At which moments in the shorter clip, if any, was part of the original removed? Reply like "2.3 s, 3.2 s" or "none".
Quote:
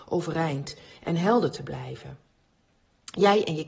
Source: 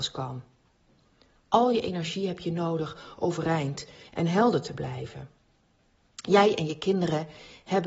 none